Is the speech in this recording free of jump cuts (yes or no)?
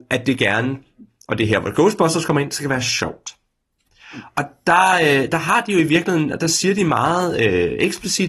yes